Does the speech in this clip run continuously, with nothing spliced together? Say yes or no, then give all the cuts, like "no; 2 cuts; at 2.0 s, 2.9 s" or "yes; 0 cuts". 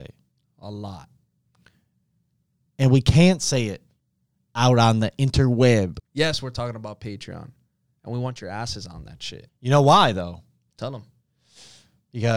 no; 2 cuts; at 6.0 s, 9.5 s